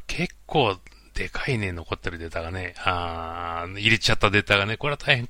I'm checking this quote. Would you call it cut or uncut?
uncut